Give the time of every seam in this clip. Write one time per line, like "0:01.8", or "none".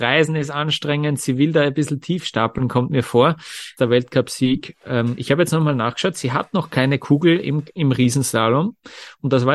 0:03.8